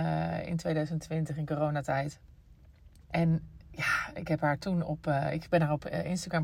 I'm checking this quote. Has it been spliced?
yes; 1 cut; at 3.1 s

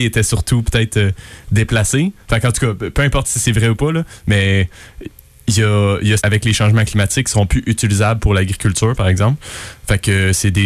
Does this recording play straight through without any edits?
no; 1 cut; at 6.2 s

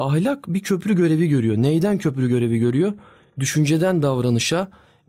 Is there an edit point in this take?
no; 0 cuts

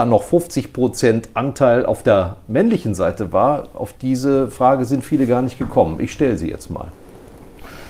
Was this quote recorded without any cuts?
yes; 0 cuts

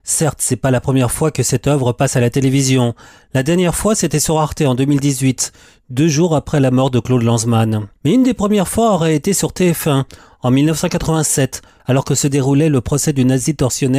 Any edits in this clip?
yes; 2 cuts; at 8.0 s, 11.8 s

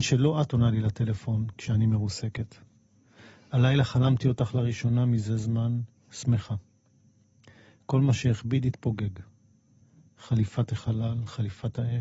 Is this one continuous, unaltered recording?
yes; 0 cuts

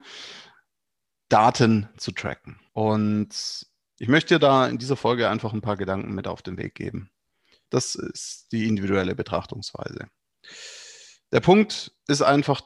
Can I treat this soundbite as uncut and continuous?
no; 2 cuts; at 2.7 s, 7.7 s

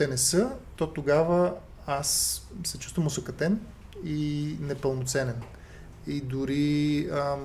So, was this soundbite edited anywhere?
no; 0 cuts

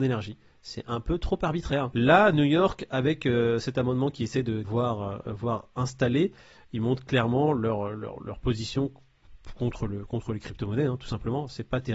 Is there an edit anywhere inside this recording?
yes; 1 cut; at 4.6 s

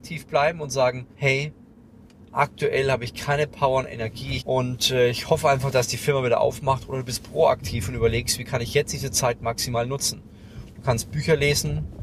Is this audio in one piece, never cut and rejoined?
no; 2 cuts; at 1.1 s, 4.4 s

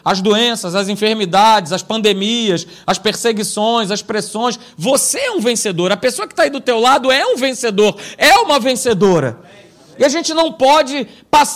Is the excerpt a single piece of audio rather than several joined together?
yes; 0 cuts

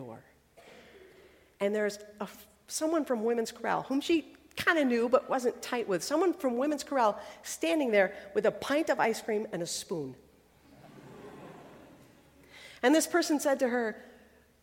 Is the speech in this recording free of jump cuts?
yes; 0 cuts

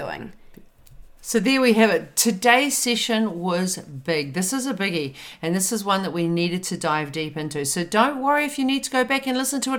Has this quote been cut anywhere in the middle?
yes; 1 cut; at 1.2 s

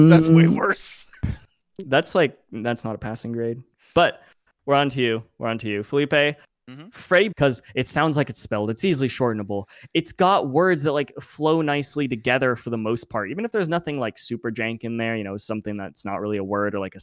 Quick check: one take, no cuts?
no; 2 cuts; at 4.5 s, 7.3 s

